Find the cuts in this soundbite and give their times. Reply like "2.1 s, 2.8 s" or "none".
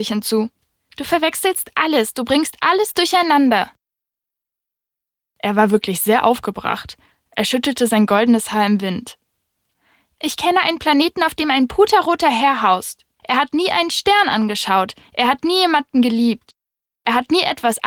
13.2 s